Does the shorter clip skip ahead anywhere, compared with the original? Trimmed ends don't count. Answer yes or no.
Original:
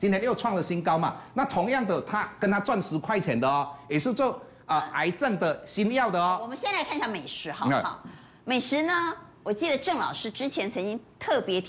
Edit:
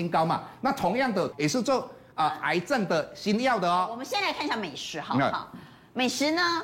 yes